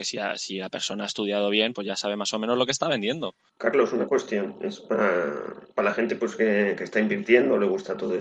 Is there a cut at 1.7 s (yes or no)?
yes